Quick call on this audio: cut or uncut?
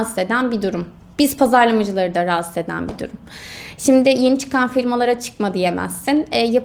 uncut